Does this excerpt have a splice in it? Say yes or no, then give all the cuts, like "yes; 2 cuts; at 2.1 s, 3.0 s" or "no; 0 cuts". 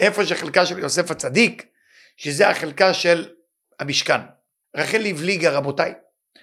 yes; 1 cut; at 4.6 s